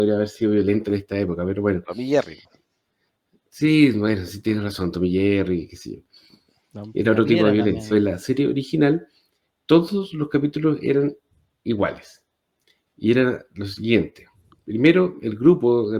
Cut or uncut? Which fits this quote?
cut